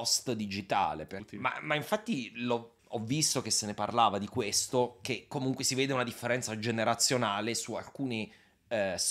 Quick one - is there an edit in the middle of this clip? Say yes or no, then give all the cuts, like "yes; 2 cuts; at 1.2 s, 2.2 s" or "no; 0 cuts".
yes; 1 cut; at 1.2 s